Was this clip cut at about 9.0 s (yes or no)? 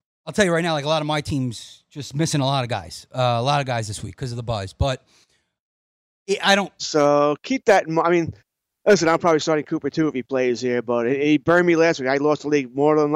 no